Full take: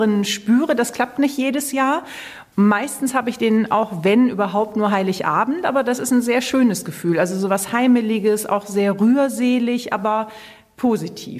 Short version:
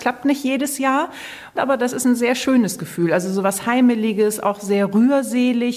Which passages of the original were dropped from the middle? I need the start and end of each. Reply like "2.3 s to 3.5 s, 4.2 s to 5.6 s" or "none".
2.5 s to 5.6 s